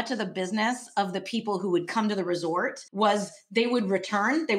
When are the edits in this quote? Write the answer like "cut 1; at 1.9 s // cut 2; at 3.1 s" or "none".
cut 1; at 2.9 s